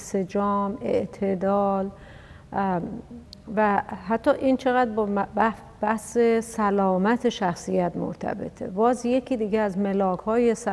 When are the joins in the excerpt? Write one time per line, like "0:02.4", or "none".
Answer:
none